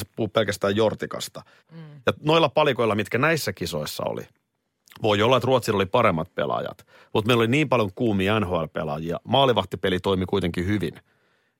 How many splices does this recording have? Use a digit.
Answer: 1